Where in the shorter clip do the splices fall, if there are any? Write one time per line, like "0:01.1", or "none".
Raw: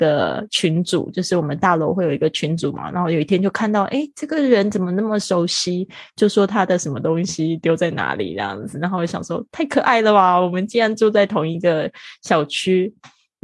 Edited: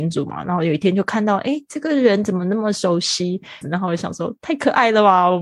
0:03.6